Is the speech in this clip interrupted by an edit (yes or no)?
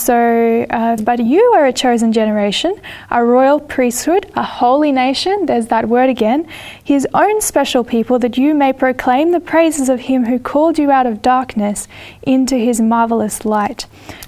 yes